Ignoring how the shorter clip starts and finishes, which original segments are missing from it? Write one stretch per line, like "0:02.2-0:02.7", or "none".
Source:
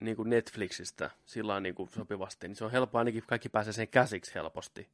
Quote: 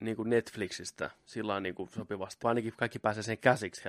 0:02.4-0:02.9